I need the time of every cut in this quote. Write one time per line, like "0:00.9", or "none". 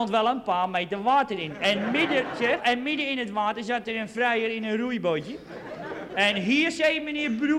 0:02.6
0:06.1